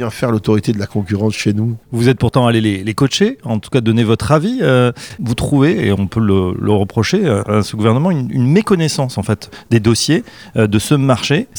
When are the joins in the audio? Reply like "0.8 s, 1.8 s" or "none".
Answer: 1.8 s

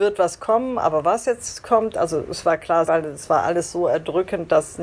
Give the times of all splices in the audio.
2.9 s

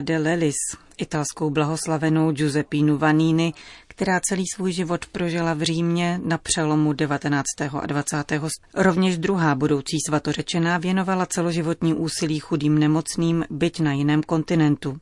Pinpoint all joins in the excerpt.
8.6 s

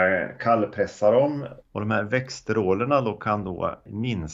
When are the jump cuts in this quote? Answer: 1.6 s

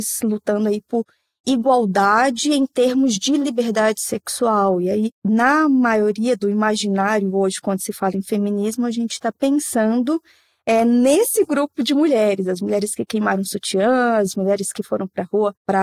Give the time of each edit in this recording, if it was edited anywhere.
5.1 s

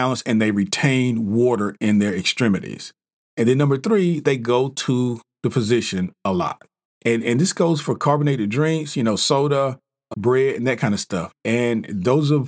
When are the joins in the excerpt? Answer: 6.9 s, 10.1 s, 11.3 s

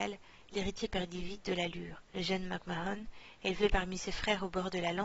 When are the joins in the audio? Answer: 2.1 s

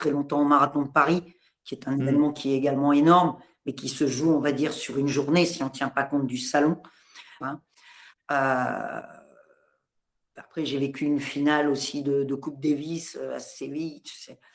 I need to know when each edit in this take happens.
7.4 s

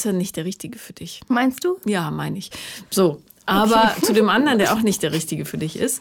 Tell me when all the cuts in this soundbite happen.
none

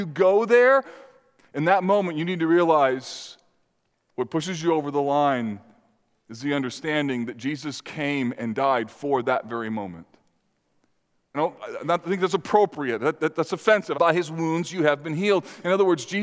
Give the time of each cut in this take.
11.3 s, 13.9 s

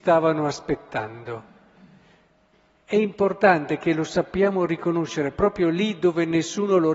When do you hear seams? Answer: none

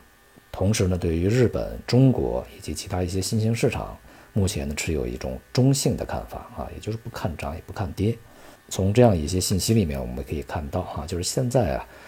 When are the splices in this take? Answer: 8.6 s

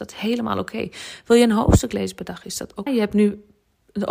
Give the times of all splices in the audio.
2.9 s

